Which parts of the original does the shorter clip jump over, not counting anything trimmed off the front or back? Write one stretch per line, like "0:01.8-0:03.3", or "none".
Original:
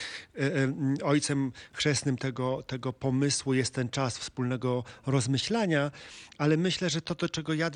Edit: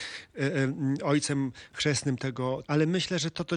0:02.6-0:06.3